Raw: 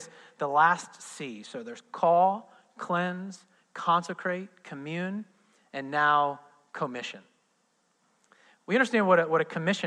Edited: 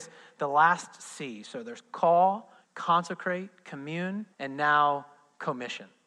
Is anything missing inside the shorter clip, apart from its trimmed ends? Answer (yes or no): yes